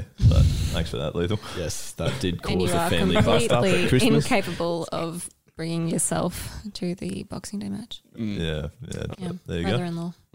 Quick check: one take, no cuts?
no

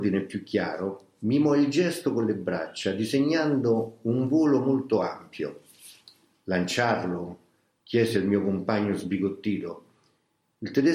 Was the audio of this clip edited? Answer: no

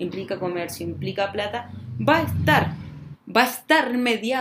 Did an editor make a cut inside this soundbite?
yes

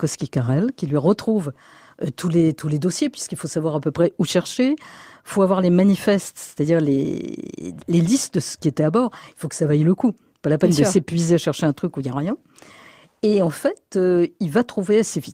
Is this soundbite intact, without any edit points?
yes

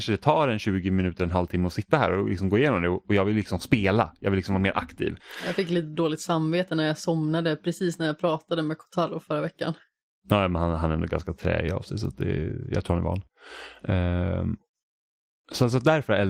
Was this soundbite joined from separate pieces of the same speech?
no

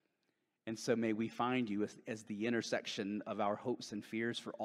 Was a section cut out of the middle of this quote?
no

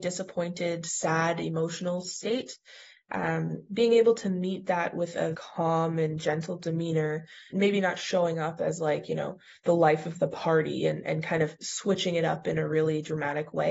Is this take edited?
yes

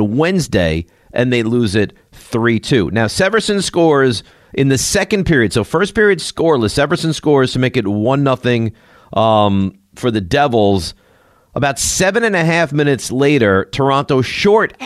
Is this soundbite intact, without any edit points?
yes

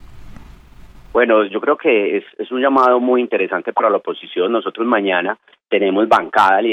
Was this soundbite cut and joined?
no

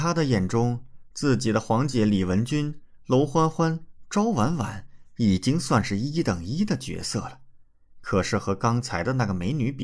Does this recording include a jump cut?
no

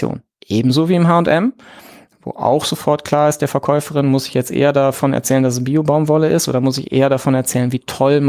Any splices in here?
no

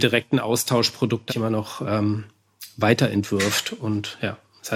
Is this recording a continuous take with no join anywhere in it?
no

